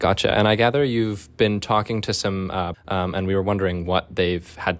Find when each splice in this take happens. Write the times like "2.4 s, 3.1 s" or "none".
2.7 s